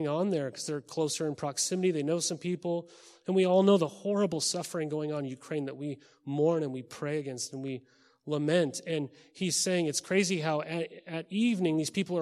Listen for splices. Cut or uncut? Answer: uncut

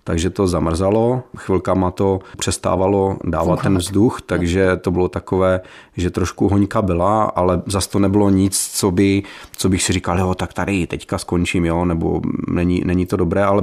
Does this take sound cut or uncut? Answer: uncut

